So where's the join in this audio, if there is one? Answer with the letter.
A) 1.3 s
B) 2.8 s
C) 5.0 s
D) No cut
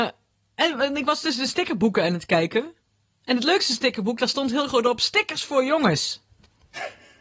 D